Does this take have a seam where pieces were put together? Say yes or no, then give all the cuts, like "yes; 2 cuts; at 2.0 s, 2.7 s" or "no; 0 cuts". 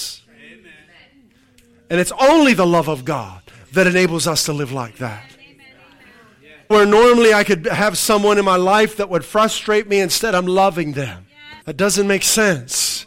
yes; 2 cuts; at 6.7 s, 11.6 s